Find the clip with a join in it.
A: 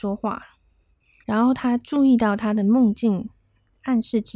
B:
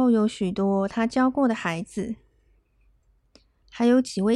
A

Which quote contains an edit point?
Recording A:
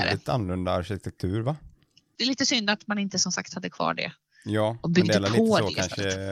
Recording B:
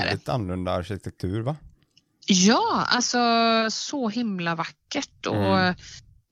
A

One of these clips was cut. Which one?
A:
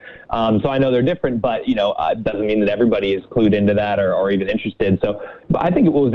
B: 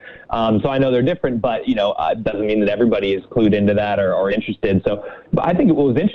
B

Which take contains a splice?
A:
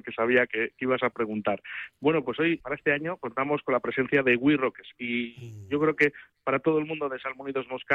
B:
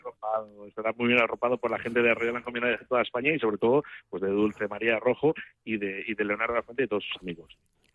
A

